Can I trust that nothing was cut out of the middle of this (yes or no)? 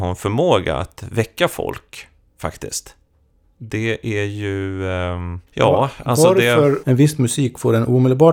no